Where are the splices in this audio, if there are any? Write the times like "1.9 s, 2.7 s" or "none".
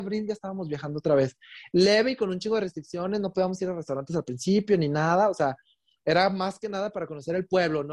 none